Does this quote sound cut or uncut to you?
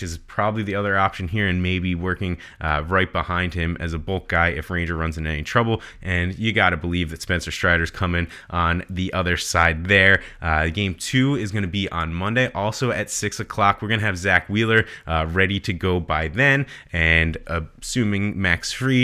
uncut